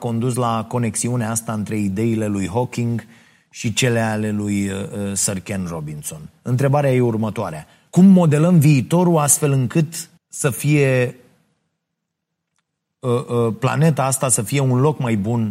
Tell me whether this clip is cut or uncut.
cut